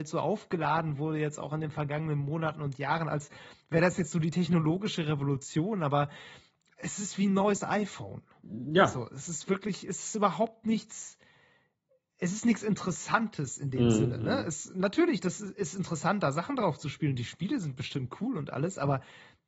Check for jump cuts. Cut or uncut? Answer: uncut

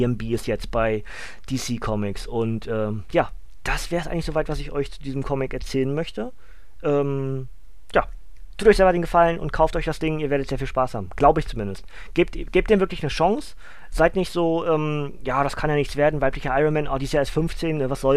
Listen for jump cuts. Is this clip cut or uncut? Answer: uncut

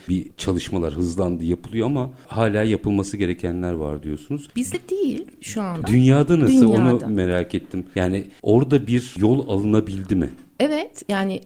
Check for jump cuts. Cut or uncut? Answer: uncut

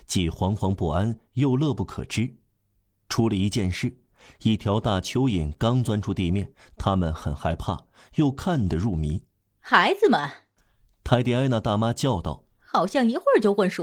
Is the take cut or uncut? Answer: cut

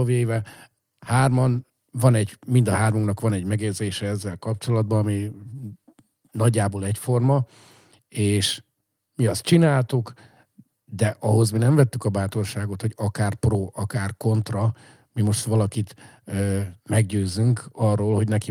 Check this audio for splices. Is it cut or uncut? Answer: uncut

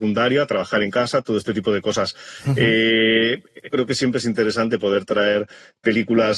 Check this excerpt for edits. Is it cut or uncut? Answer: cut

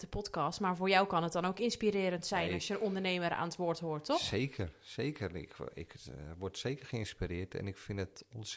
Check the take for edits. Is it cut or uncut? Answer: uncut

